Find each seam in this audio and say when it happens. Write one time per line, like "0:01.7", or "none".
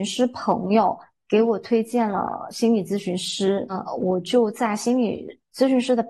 none